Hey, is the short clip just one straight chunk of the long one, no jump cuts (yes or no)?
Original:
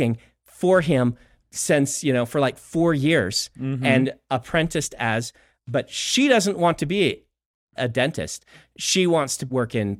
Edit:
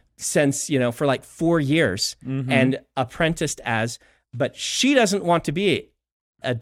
yes